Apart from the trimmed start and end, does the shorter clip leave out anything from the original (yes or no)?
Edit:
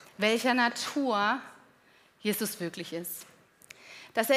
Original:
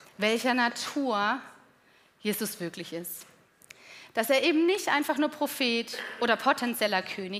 no